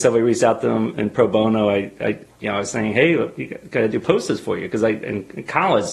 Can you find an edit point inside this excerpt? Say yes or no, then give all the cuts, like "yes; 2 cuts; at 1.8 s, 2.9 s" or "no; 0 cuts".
no; 0 cuts